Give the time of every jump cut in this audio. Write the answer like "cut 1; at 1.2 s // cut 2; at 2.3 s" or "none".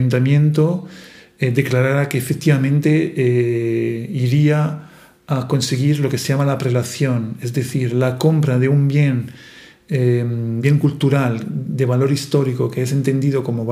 none